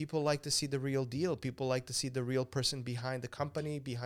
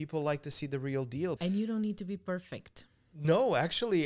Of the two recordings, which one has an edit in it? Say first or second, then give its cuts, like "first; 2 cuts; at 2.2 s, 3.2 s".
second; 1 cut; at 1.4 s